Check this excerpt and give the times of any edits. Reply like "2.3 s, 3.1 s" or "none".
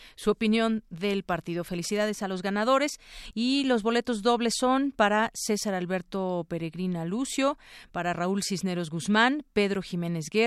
3.3 s